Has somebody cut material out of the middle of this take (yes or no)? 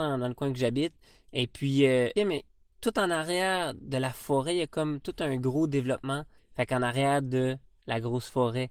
yes